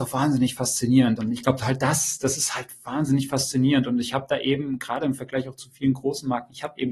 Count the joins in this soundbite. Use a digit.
1